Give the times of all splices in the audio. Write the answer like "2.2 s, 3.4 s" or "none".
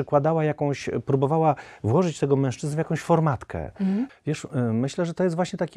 4.1 s